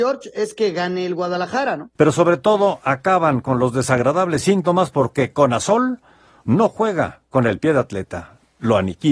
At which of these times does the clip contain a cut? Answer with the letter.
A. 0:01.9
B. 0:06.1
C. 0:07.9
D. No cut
A